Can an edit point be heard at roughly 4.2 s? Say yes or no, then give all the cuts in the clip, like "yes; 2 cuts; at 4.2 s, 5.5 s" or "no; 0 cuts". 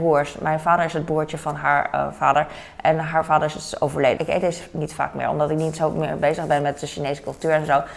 yes; 1 cut; at 4.2 s